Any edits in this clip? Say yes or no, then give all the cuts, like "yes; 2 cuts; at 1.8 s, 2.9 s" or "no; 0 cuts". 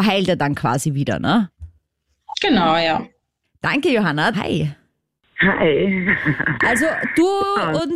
yes; 1 cut; at 4.3 s